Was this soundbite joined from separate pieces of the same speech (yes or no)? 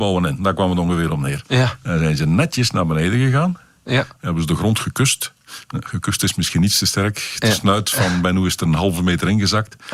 no